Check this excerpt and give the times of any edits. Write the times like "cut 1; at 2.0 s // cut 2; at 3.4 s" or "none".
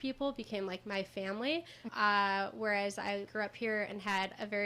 cut 1; at 1.9 s // cut 2; at 3.3 s